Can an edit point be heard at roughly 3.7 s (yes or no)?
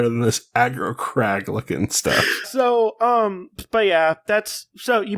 no